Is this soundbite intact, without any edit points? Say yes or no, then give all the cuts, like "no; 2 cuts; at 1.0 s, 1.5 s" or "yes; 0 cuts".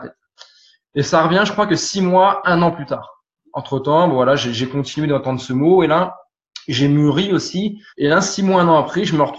no; 1 cut; at 7.9 s